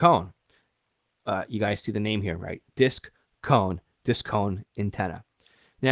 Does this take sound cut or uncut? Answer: uncut